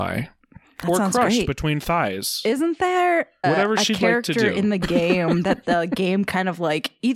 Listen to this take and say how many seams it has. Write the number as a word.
one